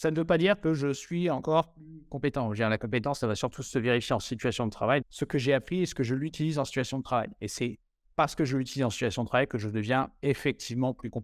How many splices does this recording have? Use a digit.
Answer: 1